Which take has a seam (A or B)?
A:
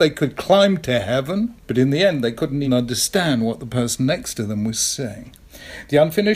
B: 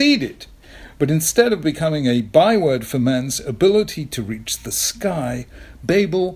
A